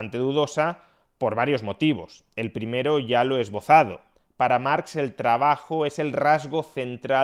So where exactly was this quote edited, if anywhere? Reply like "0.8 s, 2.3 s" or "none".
none